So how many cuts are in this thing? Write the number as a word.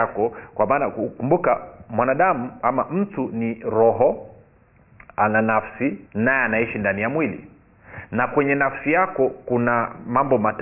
one